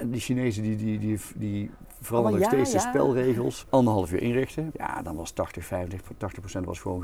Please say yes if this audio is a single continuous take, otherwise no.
no